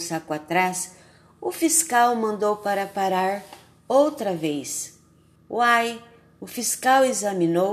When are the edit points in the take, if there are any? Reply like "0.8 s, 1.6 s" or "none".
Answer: 5.4 s

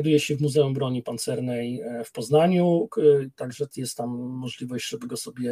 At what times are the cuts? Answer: 3.7 s

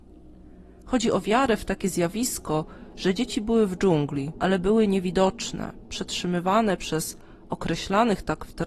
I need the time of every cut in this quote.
4.3 s

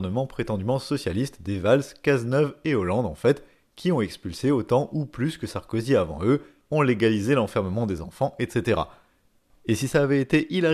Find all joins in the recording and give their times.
none

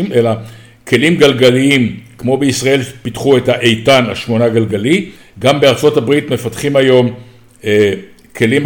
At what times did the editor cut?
none

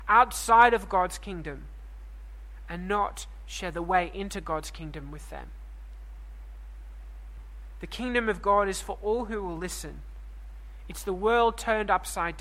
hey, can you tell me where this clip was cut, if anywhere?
none

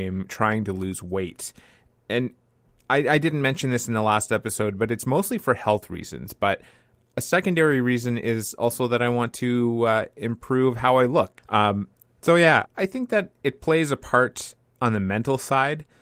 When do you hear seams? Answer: 11.4 s, 12.7 s

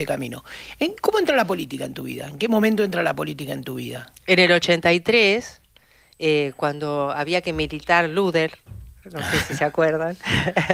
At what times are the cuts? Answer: none

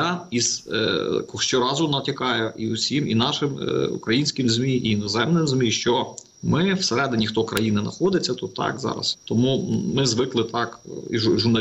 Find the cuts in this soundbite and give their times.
6.3 s, 9.1 s

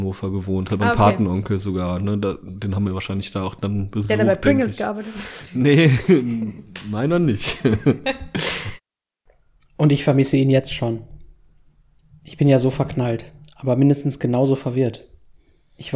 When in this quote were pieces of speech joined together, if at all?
none

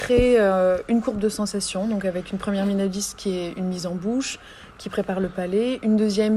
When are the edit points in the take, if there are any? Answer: none

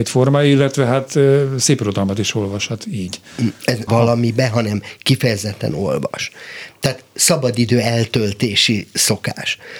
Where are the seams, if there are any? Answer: 3.9 s

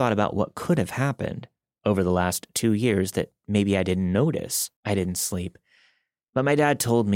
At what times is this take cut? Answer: 4.8 s

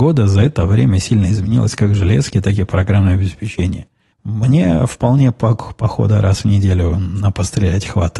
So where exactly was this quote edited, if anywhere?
4.1 s

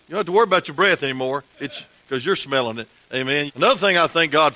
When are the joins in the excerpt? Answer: 3.5 s

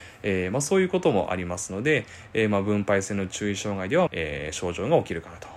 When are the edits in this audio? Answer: 4.1 s

